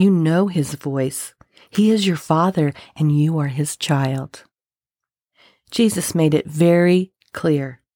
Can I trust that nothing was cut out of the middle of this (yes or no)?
yes